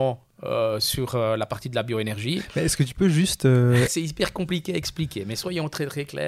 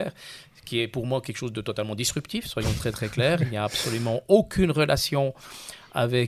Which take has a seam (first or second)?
first